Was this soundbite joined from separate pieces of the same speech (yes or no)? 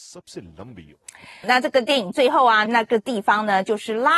yes